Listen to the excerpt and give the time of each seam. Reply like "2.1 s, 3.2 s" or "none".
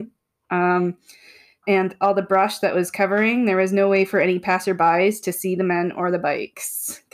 1.6 s